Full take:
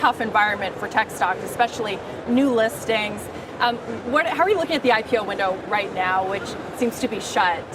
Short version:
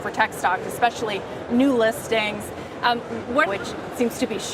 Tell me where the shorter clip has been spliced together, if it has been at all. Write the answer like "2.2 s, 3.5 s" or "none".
3.5 s